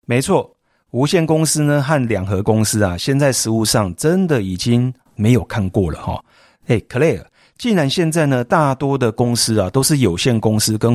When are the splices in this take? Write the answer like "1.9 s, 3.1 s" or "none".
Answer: 6.6 s